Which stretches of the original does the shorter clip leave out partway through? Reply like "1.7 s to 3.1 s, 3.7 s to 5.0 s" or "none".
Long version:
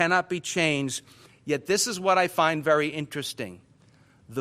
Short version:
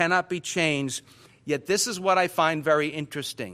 none

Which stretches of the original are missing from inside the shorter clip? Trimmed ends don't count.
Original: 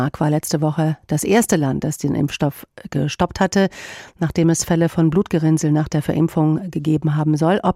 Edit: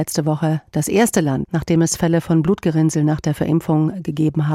1.8 s to 4.1 s

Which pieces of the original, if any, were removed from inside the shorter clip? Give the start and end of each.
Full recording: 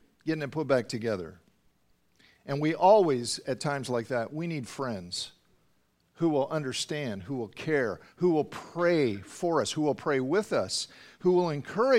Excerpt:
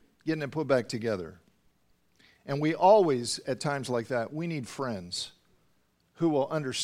none

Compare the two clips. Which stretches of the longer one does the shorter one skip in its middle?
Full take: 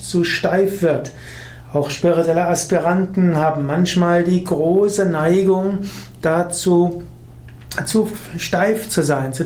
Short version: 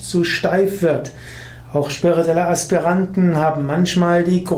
none

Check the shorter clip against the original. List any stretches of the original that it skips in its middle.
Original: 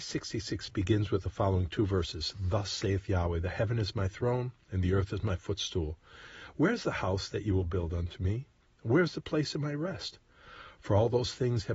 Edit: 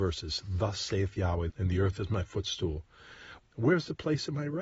3.4 s to 4.6 s, 6.5 s to 8.7 s

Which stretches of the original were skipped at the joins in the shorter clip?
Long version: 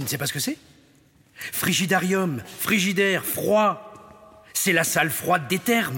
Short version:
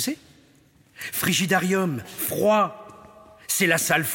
2.6 s to 3.2 s

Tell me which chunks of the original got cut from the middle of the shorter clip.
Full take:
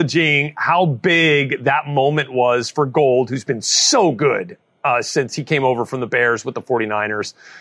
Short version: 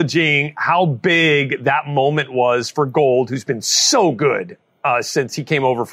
none

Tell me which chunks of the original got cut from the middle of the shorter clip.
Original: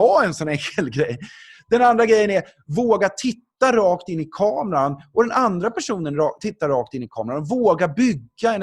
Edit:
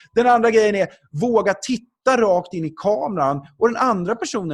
none

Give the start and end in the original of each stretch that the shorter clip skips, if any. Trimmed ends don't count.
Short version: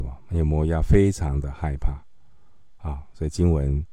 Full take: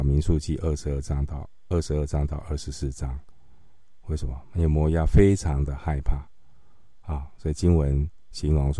none

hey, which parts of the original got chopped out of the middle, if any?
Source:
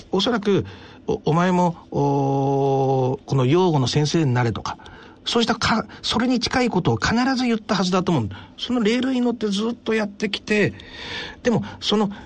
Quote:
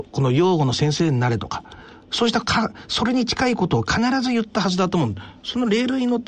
none

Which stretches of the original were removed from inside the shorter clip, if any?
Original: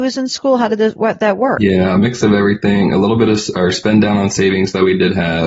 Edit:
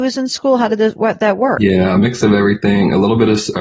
none

